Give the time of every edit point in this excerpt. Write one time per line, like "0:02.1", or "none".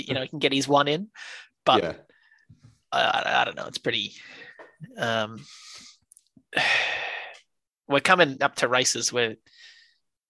none

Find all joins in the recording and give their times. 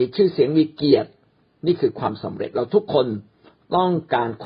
none

